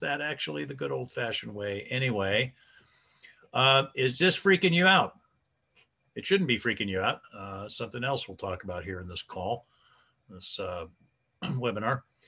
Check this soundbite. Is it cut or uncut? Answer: cut